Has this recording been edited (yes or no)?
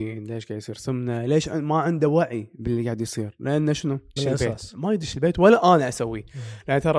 yes